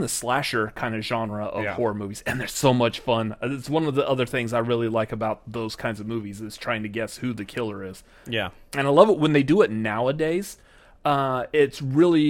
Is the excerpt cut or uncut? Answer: uncut